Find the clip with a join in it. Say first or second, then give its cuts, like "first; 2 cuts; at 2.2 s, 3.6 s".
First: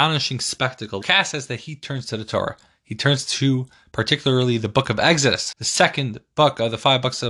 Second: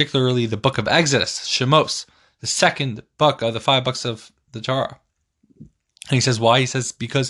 first; 2 cuts; at 1.0 s, 5.5 s